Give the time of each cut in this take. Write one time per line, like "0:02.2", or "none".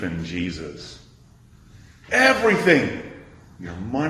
0:02.1